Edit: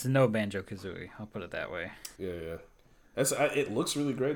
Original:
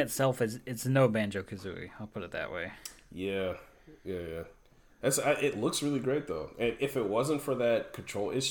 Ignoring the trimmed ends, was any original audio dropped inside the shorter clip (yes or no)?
yes